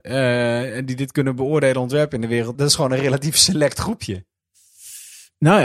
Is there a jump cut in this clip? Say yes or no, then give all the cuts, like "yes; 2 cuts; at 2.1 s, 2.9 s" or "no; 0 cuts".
yes; 1 cut; at 2.5 s